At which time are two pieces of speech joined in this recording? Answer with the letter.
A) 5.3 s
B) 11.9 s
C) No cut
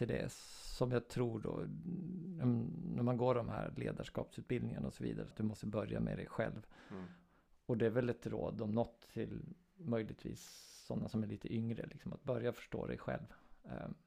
A